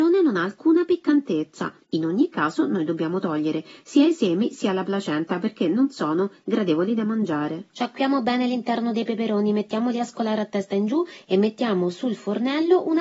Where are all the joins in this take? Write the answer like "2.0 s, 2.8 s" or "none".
1.8 s